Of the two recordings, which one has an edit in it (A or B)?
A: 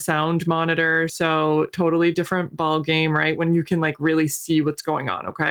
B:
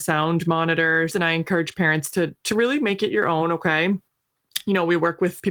B